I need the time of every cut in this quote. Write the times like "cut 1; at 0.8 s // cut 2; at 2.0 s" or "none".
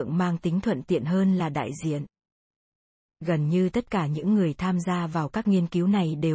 none